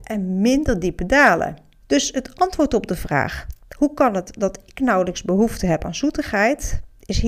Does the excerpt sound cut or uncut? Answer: cut